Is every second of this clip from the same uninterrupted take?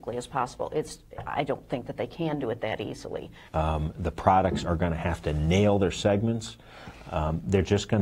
no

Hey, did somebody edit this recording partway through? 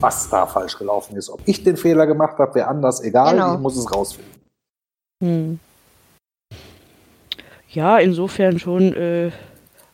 no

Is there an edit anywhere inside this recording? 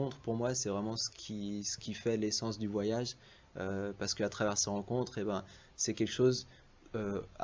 no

